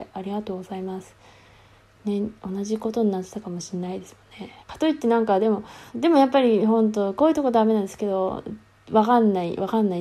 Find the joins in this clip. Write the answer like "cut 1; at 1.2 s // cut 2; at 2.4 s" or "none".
cut 1; at 4.6 s // cut 2; at 5.9 s